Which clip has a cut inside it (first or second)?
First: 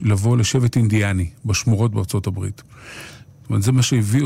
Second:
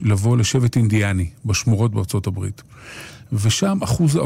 first